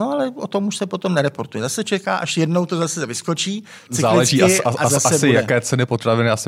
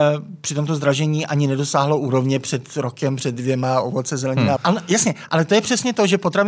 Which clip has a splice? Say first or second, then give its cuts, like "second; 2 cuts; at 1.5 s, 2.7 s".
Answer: second; 1 cut; at 4.6 s